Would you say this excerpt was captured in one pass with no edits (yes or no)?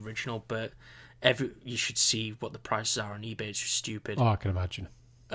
yes